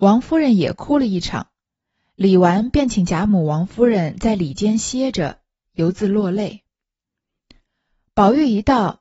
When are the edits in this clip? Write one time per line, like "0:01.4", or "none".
none